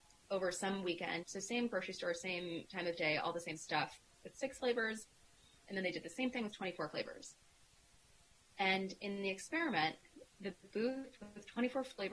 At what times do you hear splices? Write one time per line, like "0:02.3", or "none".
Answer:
0:01.2